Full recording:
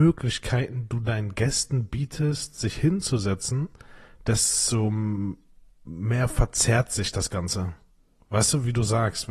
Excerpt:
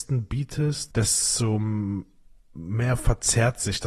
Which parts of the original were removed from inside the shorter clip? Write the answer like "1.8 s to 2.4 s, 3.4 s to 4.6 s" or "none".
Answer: 2.5 s to 4.2 s